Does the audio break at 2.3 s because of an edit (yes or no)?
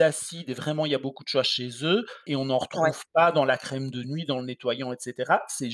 yes